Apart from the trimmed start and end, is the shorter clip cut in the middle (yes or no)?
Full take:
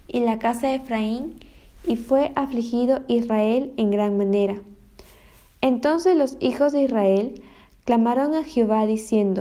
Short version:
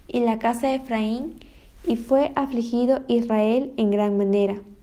no